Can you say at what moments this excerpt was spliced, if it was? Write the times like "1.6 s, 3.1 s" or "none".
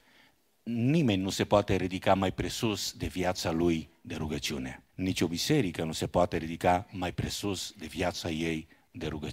4.9 s